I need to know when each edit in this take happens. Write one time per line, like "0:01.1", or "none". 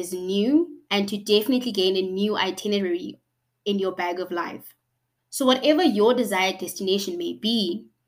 0:05.2